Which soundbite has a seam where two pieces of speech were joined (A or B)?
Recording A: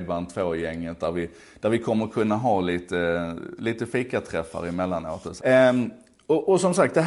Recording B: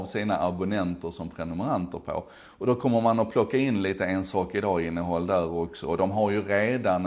A